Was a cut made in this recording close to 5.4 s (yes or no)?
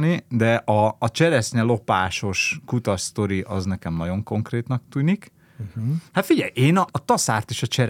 no